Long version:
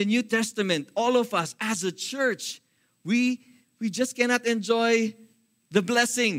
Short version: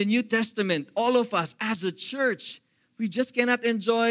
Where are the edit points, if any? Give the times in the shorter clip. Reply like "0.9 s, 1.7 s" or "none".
2.9 s